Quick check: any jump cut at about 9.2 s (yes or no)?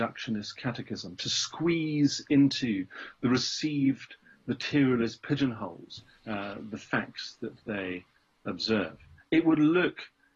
yes